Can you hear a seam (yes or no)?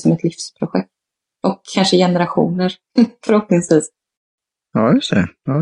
no